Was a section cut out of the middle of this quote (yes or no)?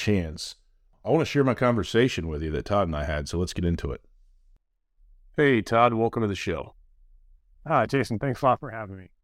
no